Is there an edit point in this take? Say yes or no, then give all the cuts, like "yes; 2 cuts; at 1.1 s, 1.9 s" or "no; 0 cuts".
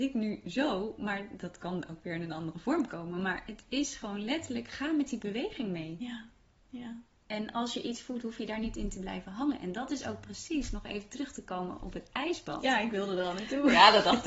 no; 0 cuts